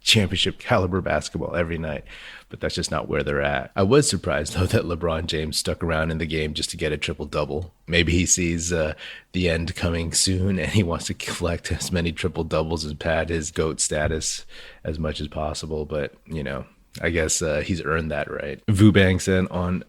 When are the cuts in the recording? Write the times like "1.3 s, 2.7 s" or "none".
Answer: 18.6 s